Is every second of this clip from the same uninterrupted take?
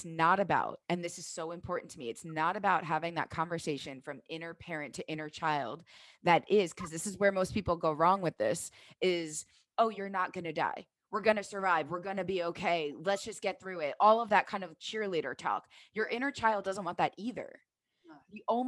yes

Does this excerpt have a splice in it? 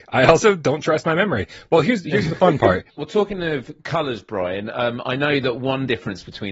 yes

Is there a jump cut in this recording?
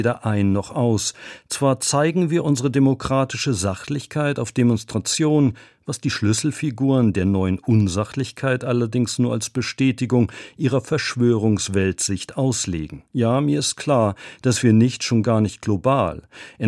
yes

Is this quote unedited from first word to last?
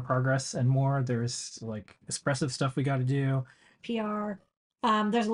no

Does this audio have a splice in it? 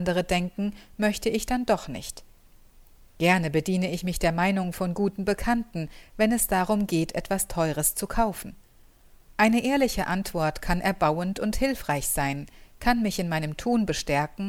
yes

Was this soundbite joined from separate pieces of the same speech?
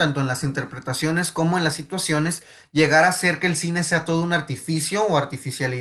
no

